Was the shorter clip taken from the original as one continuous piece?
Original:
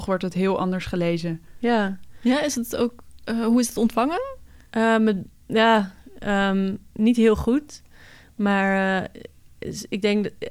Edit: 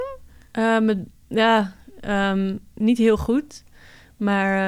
yes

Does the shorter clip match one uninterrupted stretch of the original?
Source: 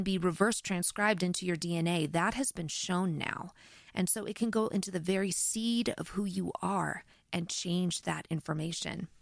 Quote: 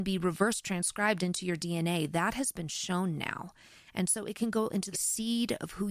no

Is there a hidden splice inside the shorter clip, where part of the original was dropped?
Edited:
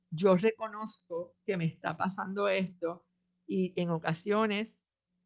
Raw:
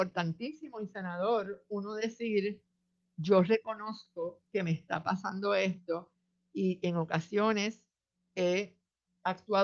no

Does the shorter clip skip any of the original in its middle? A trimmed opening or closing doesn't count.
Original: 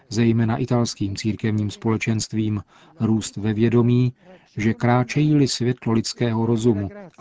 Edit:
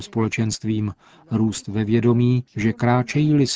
yes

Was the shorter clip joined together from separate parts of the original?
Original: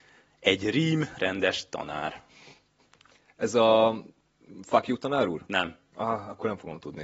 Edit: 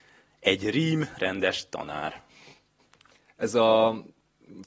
no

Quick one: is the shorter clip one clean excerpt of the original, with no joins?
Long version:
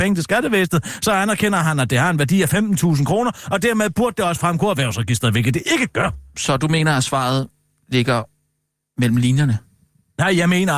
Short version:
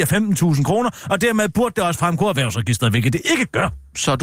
yes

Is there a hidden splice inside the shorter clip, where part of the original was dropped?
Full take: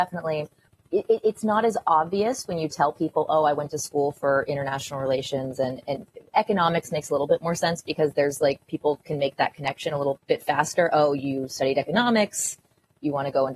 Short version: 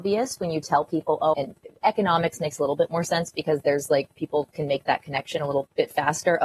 yes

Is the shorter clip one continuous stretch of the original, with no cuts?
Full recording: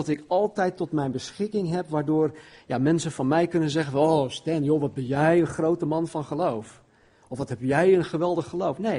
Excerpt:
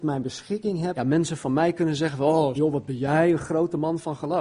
no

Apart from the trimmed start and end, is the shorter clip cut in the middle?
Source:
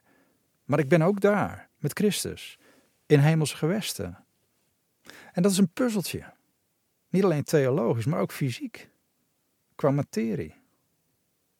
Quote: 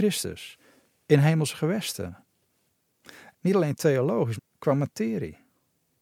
yes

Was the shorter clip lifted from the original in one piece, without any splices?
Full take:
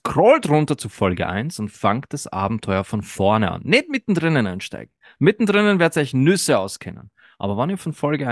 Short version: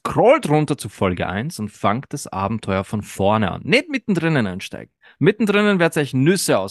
yes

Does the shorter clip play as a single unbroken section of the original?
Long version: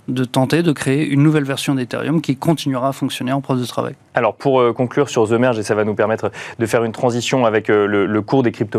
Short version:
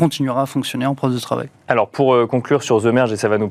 yes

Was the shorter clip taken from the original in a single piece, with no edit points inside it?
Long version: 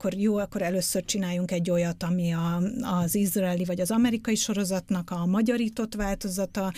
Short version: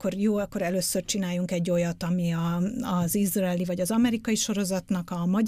yes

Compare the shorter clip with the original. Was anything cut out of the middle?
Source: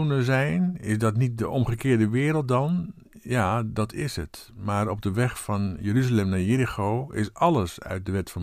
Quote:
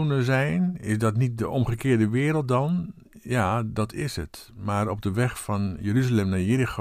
no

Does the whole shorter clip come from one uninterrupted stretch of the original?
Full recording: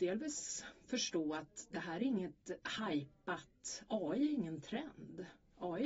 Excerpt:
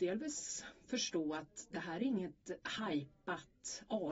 yes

